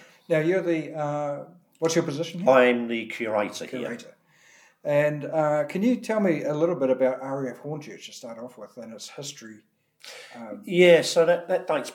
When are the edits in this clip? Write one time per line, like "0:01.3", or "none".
none